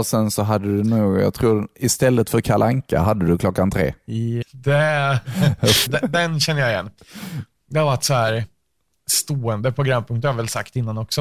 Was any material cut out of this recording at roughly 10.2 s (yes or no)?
no